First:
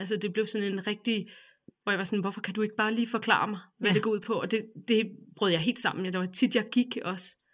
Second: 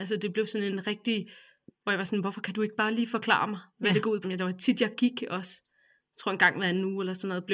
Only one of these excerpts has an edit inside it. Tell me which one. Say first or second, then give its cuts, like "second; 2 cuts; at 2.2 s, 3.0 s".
second; 1 cut; at 4.2 s